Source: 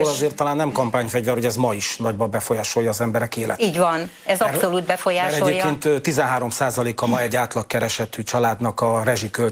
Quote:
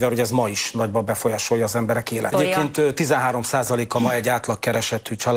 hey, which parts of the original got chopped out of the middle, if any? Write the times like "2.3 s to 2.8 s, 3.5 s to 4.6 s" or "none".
3.6 s to 5.4 s